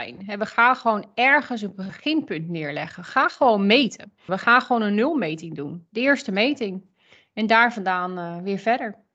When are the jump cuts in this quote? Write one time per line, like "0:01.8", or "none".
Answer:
0:04.3